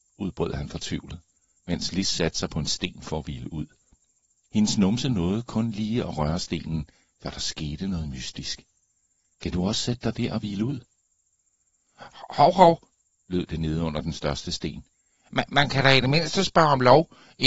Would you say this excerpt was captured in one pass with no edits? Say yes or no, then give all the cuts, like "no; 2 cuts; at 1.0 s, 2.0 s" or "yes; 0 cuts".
no; 1 cut; at 9.3 s